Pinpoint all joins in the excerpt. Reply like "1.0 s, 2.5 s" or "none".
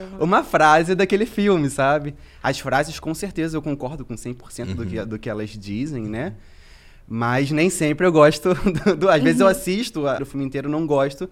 10.2 s